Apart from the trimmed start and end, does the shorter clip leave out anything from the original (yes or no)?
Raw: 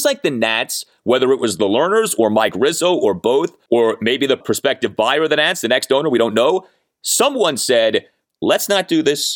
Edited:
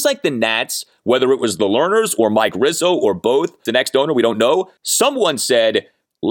yes